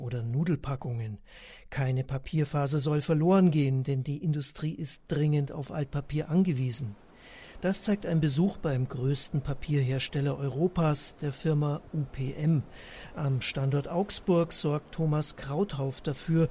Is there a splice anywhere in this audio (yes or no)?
no